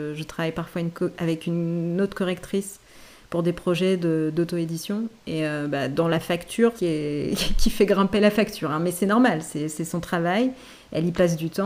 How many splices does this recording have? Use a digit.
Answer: 1